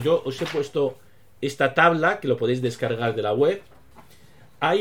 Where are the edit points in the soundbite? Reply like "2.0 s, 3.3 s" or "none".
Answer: none